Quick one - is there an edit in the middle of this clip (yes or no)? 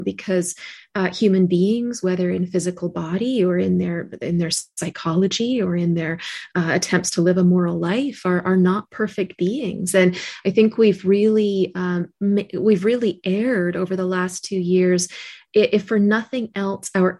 no